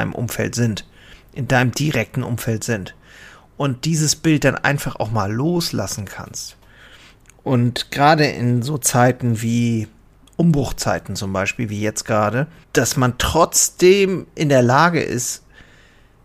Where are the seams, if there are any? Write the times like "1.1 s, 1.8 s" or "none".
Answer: 12.6 s

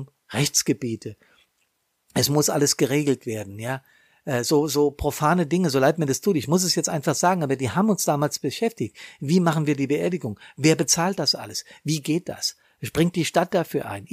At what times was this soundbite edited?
none

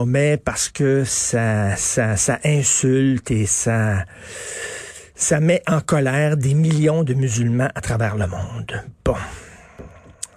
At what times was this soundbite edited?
none

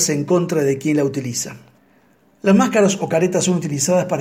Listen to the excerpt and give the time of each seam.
none

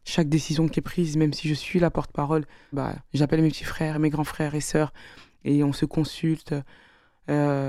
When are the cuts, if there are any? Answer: 2.7 s, 3.9 s

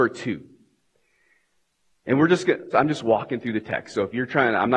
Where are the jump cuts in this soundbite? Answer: 2.7 s

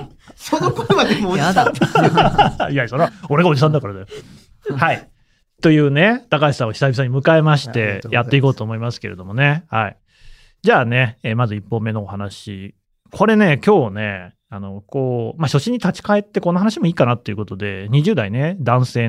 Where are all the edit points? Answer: none

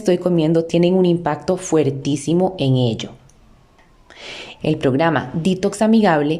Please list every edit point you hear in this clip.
4.6 s

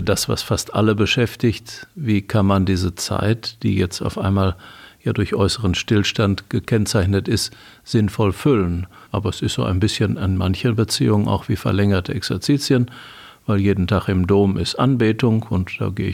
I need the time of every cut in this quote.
9.1 s

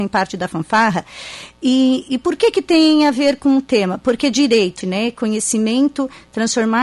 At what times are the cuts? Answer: 4.8 s

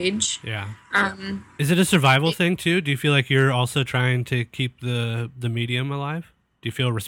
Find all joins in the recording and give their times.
1.6 s

